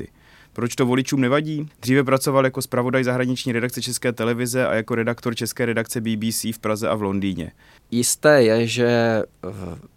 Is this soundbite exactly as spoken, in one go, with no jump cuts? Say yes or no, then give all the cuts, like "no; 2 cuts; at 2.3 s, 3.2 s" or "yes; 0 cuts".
no; 2 cuts; at 1.7 s, 7.8 s